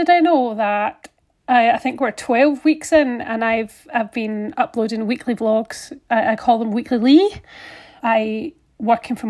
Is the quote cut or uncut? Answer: cut